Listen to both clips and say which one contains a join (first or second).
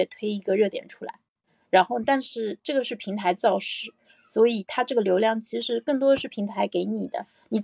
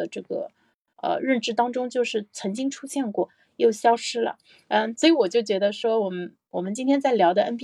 second